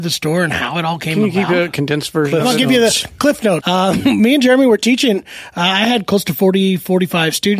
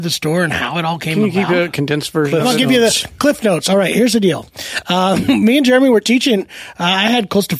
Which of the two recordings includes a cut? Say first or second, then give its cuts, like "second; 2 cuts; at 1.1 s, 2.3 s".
first; 1 cut; at 3.6 s